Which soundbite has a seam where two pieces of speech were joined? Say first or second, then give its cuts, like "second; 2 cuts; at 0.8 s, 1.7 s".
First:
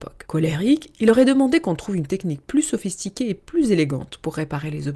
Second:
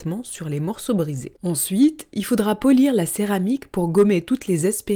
second; 1 cut; at 1.3 s